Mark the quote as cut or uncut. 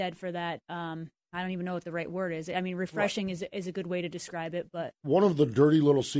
uncut